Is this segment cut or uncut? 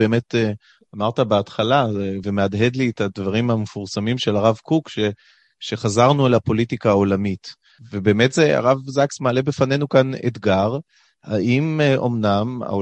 uncut